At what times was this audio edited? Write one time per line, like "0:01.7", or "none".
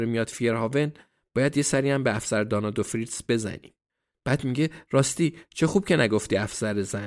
0:04.1